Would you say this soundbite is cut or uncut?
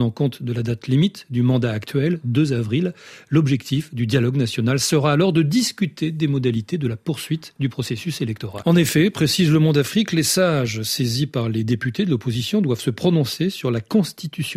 cut